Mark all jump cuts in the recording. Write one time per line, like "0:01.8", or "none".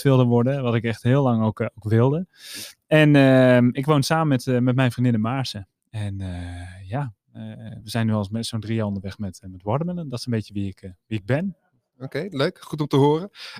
none